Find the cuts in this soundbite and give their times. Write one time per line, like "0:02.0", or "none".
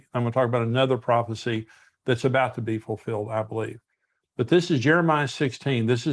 none

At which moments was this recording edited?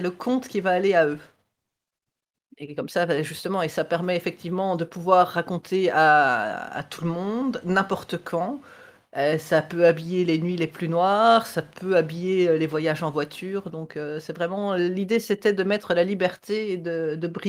0:02.4

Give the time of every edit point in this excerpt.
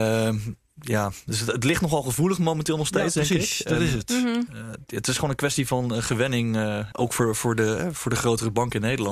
0:06.9

